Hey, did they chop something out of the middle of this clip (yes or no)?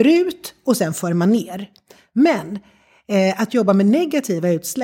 no